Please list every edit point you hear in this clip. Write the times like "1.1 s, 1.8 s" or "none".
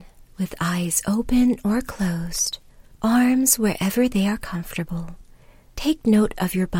5.7 s

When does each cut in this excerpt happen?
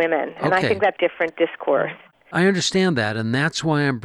1.0 s

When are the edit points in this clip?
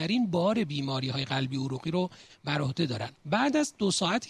3.2 s

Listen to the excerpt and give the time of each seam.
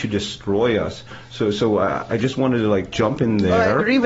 none

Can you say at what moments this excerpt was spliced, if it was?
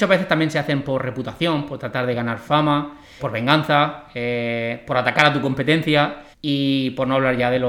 3.2 s, 6.3 s

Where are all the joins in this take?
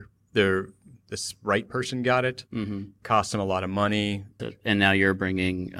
4.4 s

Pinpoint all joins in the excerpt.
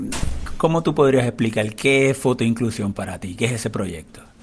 none

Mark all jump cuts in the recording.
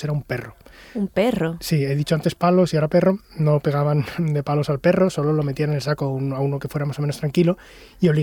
none

